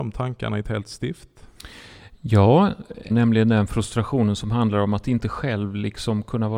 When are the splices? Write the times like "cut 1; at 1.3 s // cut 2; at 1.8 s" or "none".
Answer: cut 1; at 3.1 s